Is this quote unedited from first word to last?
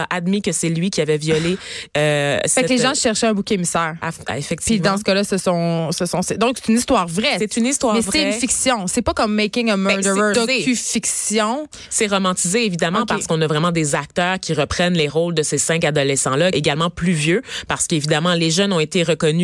no; 2 cuts; at 10.3 s, 16.5 s

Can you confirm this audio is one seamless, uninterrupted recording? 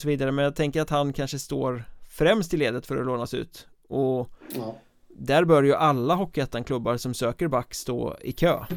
yes; 0 cuts

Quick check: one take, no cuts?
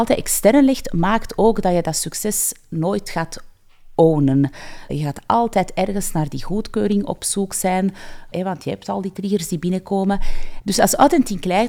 no; 3 cuts; at 4.9 s, 8.3 s, 10.6 s

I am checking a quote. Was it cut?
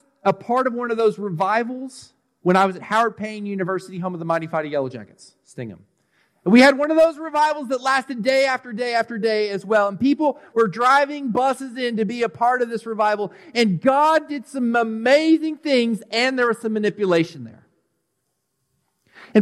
no; 0 cuts

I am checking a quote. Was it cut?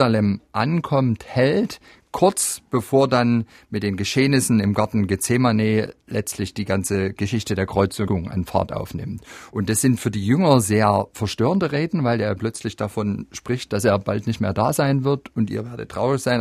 no; 0 cuts

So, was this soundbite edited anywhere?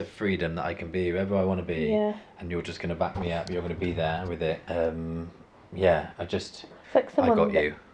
yes; 2 cuts; at 4.7 s, 6.8 s

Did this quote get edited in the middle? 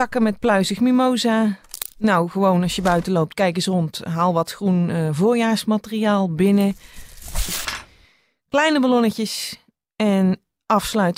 no; 0 cuts

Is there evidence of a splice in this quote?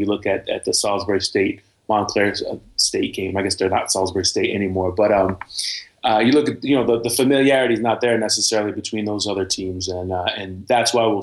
no; 0 cuts

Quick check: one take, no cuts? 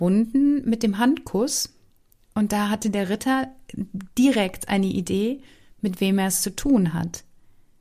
yes; 0 cuts

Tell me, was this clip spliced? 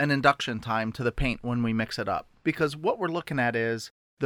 no; 0 cuts

